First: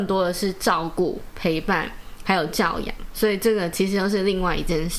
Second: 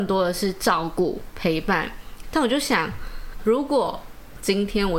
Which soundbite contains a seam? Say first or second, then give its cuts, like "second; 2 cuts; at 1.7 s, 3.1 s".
second; 2 cuts; at 2.2 s, 3.4 s